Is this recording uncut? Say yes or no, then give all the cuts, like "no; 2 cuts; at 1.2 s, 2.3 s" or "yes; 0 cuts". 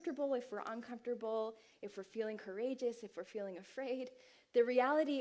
yes; 0 cuts